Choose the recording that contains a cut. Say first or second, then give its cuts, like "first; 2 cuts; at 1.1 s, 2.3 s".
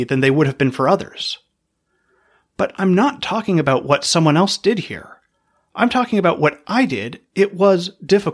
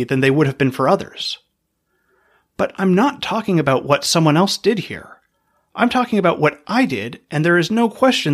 first; 1 cut; at 7.3 s